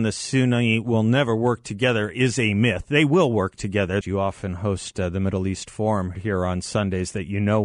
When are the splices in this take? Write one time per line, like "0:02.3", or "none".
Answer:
0:04.0
0:06.1